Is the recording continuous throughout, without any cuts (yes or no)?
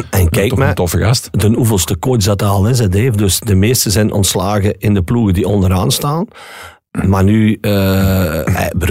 yes